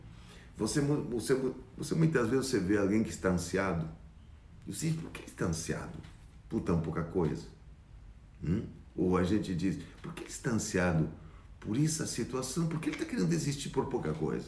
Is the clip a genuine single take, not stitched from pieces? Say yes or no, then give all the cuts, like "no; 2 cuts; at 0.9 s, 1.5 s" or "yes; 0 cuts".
yes; 0 cuts